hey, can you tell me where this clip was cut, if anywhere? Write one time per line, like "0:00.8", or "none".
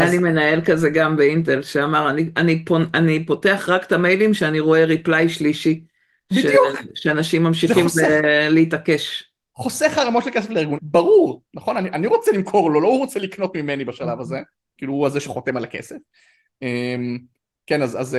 0:10.8
0:14.8